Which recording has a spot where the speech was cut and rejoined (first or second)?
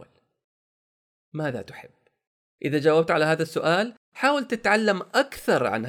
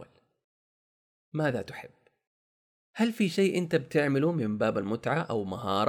first